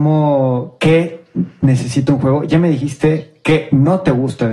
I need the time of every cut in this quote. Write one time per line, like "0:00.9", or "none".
none